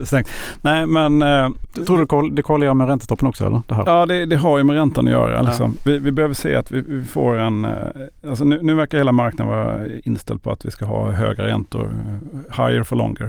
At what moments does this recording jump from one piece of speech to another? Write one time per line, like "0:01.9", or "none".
none